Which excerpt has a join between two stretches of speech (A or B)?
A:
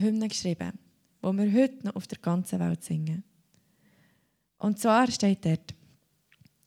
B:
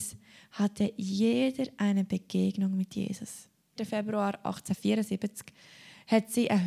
B